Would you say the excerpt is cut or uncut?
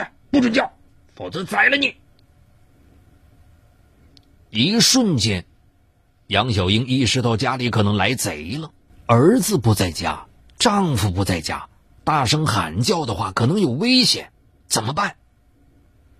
cut